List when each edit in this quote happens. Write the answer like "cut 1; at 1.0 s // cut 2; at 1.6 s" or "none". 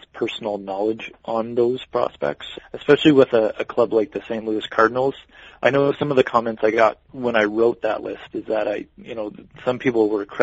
cut 1; at 2.5 s